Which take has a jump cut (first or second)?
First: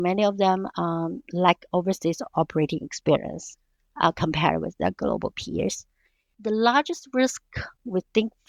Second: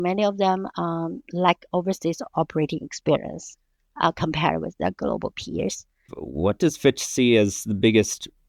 second